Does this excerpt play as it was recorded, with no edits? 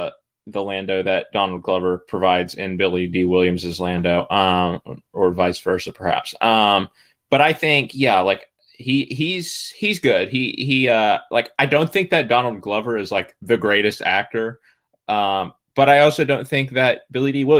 yes; 0 cuts

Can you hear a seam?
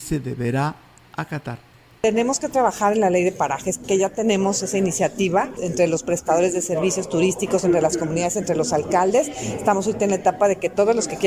yes; 1 cut; at 5.6 s

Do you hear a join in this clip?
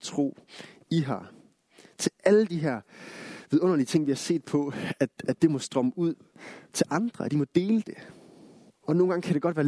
yes; 1 cut; at 8.7 s

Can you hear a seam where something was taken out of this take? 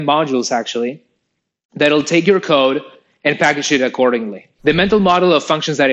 yes; 1 cut; at 4.6 s

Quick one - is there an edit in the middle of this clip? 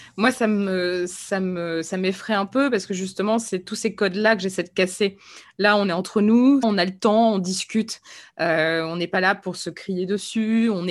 yes; 1 cut; at 6.6 s

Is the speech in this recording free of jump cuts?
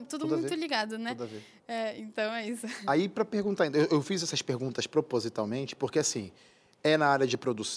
yes; 0 cuts

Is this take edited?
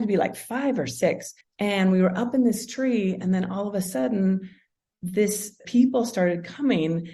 yes; 2 cuts; at 1.4 s, 5.6 s

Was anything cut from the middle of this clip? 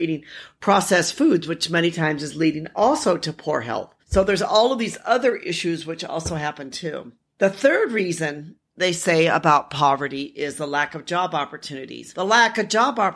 yes; 1 cut; at 4.0 s

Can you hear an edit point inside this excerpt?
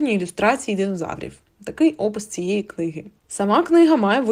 no; 0 cuts

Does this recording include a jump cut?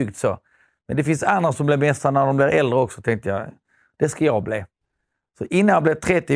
no; 0 cuts

